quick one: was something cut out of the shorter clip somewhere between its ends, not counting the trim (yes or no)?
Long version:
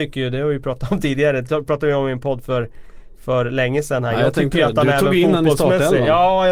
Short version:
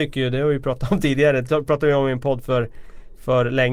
no